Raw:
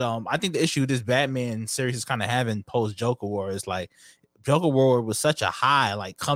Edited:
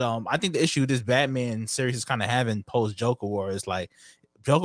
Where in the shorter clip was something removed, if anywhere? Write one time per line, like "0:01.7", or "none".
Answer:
none